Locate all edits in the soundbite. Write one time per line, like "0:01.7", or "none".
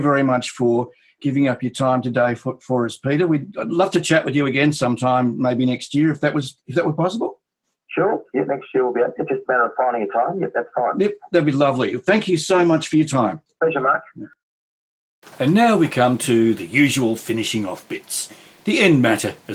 none